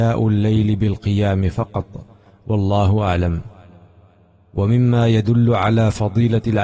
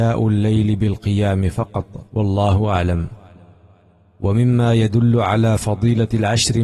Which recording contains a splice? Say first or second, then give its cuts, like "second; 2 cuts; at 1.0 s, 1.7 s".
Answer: second; 1 cut; at 2.1 s